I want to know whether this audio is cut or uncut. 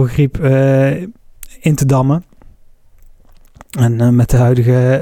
uncut